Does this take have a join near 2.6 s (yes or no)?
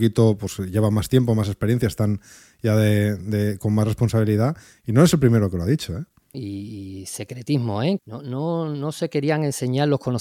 no